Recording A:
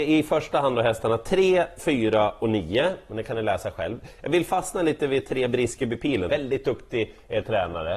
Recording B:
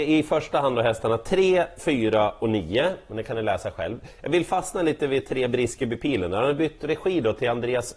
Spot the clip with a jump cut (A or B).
A